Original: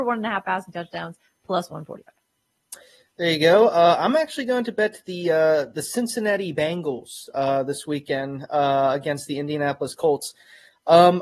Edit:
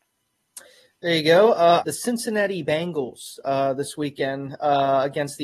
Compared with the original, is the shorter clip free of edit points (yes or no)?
no